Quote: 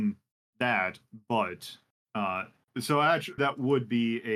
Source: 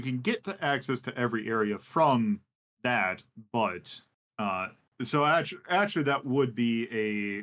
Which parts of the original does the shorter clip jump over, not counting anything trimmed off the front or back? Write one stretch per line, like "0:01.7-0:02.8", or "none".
0:05.6-0:06.0